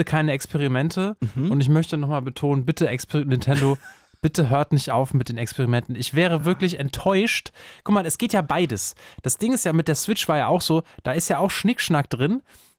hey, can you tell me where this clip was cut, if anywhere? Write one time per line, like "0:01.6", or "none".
none